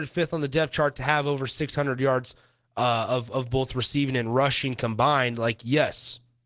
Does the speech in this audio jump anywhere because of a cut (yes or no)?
no